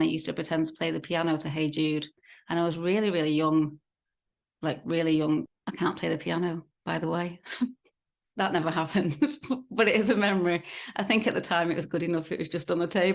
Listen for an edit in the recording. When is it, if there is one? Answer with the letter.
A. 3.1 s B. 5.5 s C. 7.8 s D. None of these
B